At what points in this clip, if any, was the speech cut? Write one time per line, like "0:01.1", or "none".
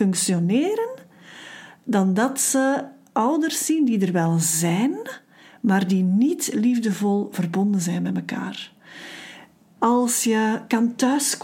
0:09.8